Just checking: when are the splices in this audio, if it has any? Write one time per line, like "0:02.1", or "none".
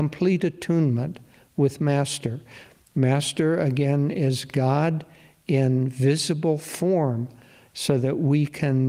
none